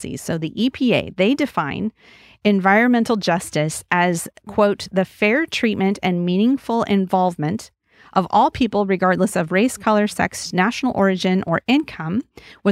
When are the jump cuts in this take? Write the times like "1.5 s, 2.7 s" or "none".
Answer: none